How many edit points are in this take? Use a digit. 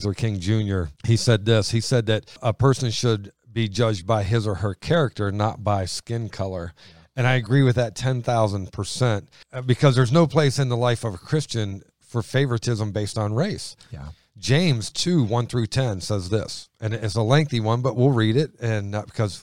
1